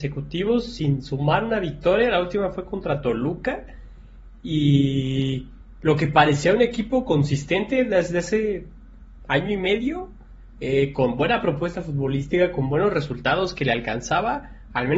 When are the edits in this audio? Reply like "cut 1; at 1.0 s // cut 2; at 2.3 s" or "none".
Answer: none